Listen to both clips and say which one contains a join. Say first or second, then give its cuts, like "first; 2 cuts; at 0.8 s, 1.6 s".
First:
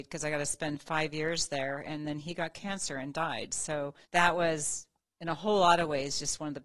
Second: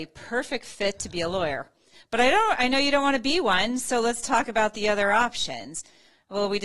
first; 1 cut; at 4.0 s